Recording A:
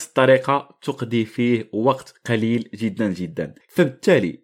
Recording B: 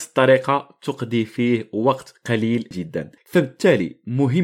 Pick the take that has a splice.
B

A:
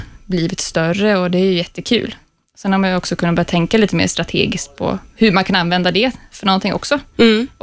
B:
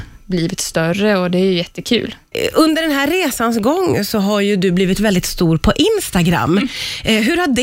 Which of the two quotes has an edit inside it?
B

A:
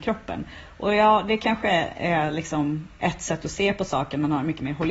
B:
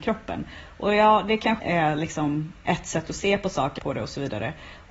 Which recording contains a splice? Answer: B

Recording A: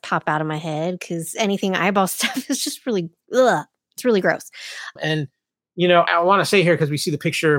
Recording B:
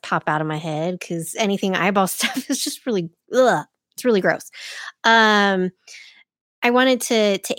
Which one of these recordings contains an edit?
A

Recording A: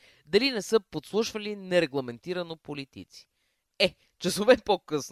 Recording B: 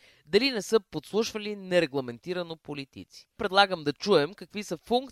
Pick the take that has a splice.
B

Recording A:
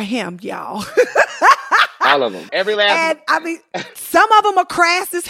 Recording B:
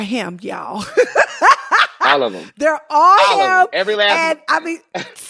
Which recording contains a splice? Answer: A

